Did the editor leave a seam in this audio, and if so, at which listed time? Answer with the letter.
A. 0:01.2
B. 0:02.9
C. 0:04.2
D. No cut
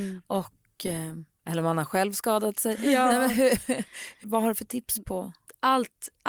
C